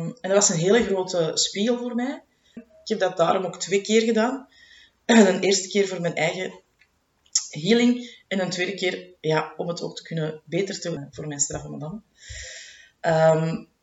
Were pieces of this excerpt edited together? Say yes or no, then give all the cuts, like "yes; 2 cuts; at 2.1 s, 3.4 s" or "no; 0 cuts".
yes; 2 cuts; at 2.6 s, 11.0 s